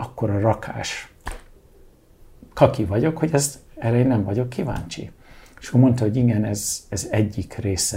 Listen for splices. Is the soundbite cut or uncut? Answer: uncut